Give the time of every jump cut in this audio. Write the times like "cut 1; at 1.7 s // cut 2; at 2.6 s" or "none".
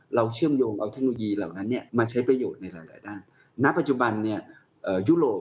cut 1; at 1.9 s